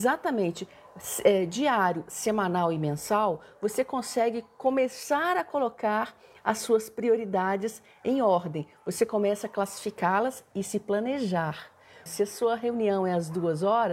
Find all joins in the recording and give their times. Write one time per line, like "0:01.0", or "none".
0:12.1